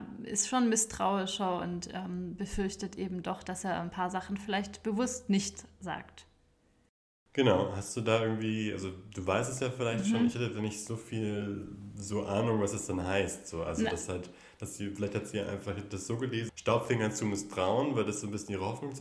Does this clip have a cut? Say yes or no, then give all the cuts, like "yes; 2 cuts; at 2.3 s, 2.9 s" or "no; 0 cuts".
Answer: yes; 1 cut; at 16.5 s